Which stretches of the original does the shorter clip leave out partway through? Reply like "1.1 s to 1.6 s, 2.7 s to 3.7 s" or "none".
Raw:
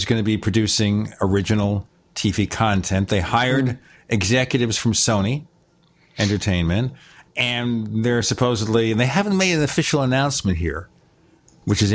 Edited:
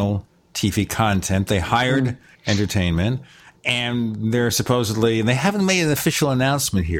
4.0 s to 6.1 s